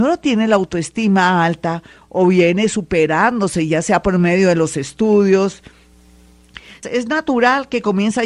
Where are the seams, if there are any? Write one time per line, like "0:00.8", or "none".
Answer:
0:06.8